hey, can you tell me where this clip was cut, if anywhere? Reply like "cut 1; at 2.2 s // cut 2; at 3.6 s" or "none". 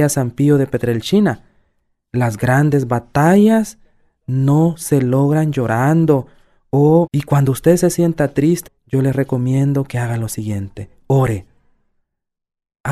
cut 1; at 7.1 s // cut 2; at 8.7 s